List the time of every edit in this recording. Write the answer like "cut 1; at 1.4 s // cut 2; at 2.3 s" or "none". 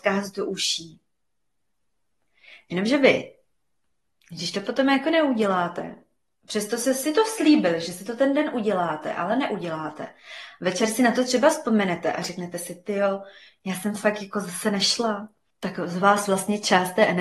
cut 1; at 15.5 s